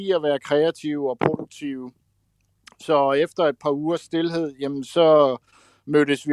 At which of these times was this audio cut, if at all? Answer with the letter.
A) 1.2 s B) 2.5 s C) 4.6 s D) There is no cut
D